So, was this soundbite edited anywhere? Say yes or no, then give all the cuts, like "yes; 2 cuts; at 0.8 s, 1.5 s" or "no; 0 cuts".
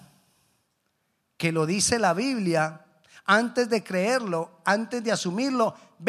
no; 0 cuts